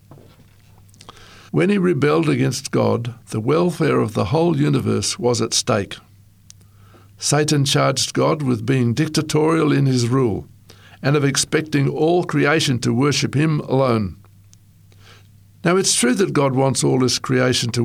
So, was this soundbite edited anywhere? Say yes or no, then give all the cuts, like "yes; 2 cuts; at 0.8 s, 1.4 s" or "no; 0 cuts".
yes; 1 cut; at 1.5 s